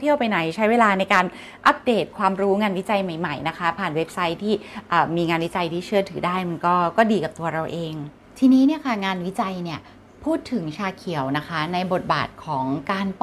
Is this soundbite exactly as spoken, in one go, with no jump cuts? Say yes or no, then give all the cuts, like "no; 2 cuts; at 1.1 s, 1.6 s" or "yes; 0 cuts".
yes; 0 cuts